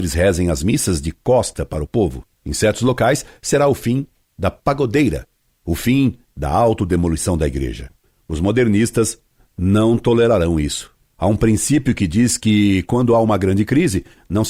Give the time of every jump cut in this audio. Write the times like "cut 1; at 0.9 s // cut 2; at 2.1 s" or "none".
cut 1; at 2.4 s